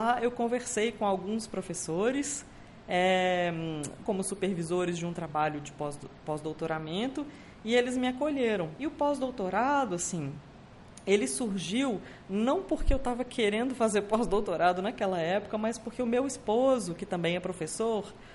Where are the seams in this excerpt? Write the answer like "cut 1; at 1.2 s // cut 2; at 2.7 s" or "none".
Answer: cut 1; at 4.1 s // cut 2; at 8.8 s